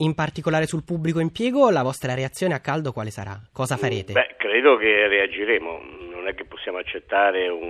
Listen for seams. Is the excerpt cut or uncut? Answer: uncut